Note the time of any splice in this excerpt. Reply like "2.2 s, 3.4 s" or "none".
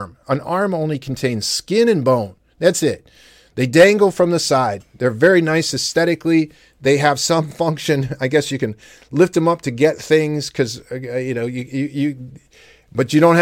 none